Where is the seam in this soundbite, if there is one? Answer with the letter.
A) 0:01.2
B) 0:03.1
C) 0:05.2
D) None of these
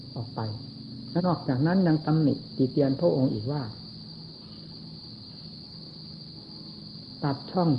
A